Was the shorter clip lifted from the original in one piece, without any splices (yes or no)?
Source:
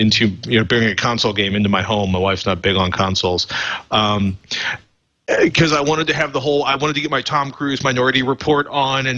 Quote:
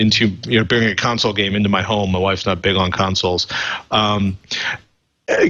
yes